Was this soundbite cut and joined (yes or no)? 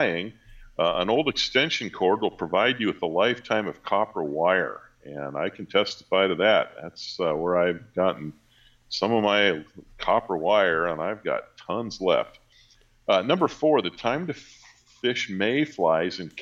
no